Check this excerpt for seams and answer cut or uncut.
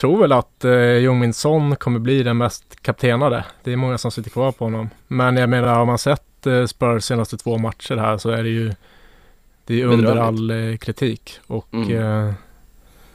uncut